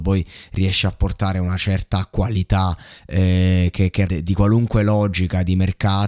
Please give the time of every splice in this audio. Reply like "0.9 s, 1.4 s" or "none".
4.1 s